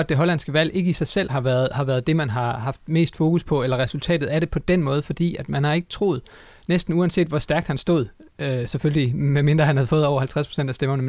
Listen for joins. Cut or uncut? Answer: uncut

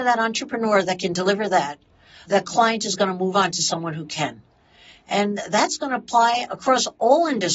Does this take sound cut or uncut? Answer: uncut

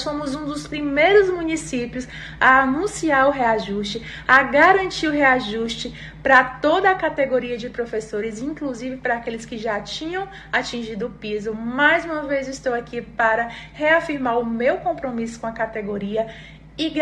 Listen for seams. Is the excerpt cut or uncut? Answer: uncut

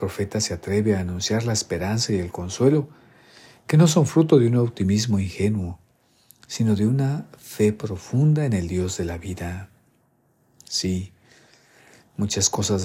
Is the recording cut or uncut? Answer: uncut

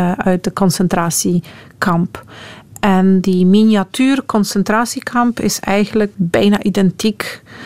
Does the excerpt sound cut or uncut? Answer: uncut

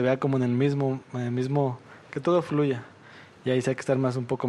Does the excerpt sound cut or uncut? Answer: uncut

